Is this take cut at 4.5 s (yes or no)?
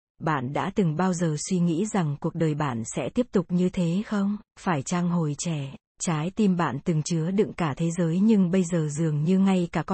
yes